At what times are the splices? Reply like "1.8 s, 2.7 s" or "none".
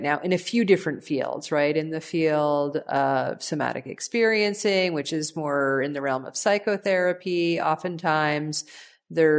none